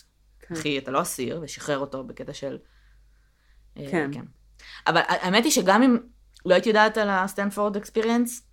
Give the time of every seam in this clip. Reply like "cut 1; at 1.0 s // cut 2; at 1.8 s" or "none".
none